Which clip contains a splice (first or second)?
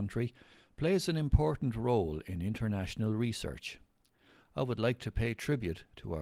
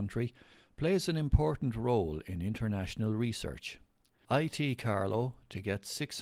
second